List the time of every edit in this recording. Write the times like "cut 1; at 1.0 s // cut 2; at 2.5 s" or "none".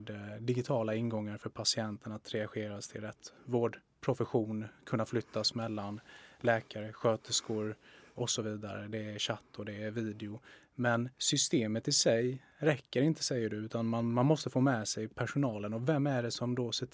none